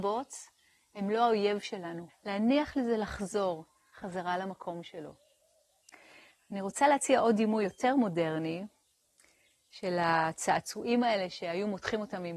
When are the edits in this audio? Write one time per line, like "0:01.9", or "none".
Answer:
0:02.1